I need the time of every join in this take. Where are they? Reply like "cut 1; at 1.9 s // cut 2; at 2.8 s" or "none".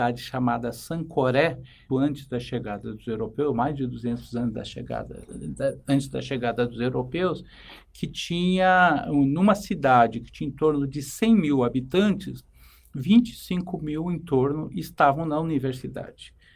cut 1; at 1.9 s